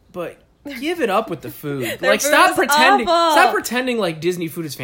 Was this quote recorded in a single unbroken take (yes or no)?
yes